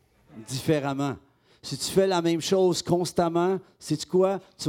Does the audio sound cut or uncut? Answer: uncut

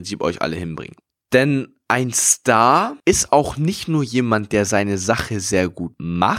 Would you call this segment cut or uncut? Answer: uncut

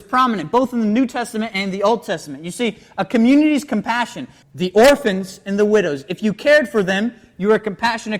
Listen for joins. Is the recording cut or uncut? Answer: cut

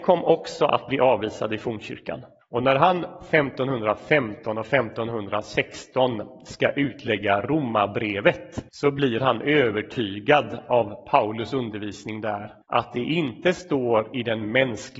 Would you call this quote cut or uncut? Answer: cut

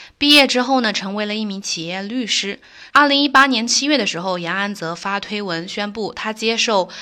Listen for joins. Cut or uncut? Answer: cut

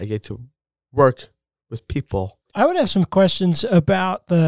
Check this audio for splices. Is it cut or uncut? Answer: cut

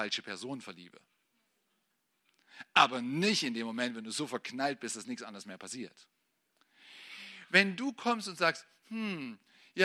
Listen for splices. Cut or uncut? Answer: uncut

